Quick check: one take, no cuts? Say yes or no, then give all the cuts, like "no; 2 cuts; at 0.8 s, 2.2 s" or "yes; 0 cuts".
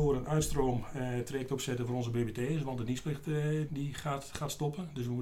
no; 1 cut; at 3.7 s